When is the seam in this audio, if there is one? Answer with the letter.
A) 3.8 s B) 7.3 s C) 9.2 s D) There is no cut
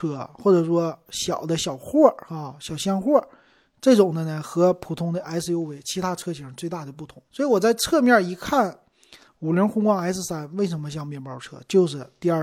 B